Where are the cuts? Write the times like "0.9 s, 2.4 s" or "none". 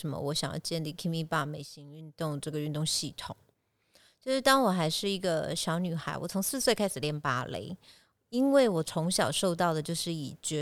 none